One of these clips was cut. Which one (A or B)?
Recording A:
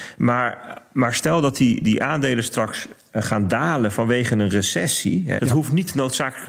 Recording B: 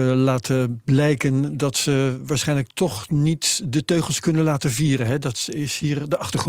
A